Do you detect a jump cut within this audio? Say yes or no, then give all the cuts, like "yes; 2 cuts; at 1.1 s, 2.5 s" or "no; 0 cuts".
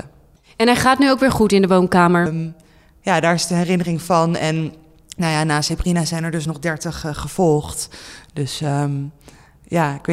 yes; 1 cut; at 2.3 s